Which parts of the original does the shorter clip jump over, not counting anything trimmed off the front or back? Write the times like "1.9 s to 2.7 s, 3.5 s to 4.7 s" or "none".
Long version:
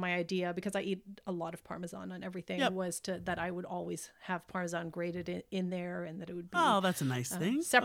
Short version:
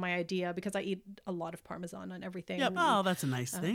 2.7 s to 6.5 s